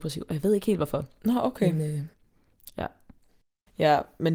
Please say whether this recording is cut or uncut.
uncut